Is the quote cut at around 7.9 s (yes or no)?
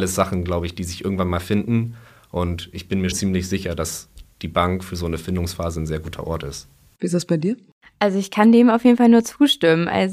no